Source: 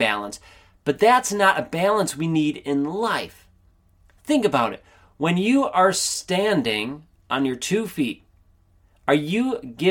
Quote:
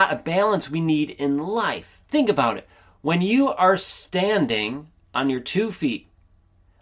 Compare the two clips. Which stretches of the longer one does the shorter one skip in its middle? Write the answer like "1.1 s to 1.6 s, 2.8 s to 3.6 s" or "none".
3.5 s to 4.2 s